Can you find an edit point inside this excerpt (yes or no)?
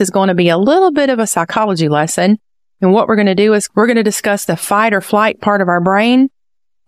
no